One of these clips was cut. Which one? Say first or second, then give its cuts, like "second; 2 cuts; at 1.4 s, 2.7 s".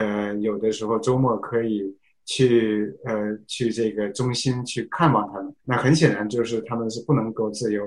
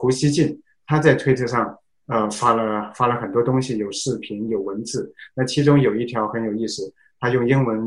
first; 1 cut; at 5.6 s